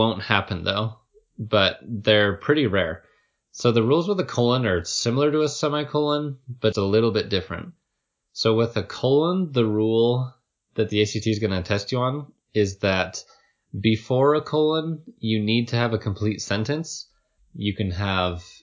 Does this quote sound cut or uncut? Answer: cut